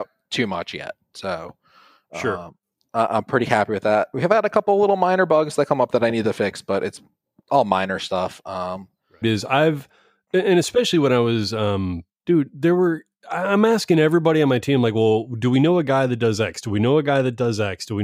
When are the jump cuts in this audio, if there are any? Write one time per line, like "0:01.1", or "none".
0:09.2
0:12.2